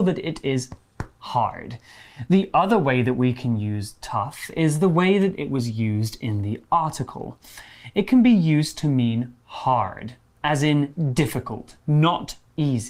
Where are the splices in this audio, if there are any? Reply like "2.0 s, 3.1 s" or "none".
none